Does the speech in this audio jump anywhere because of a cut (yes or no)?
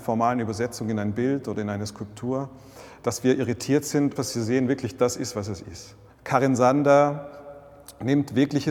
yes